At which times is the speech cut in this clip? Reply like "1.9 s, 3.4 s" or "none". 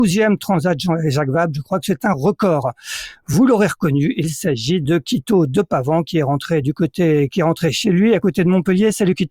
none